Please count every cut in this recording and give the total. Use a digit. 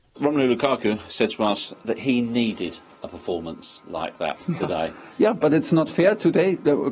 0